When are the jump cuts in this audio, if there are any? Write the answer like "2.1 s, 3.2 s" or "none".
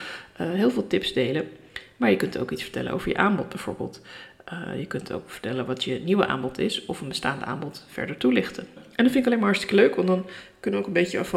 8.8 s